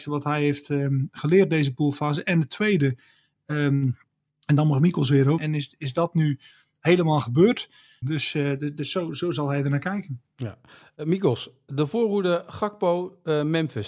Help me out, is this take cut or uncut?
cut